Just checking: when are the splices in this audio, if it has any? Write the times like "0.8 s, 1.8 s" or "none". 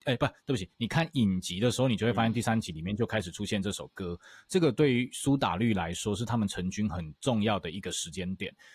none